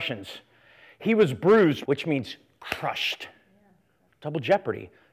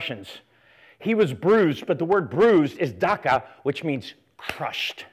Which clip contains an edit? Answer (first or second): first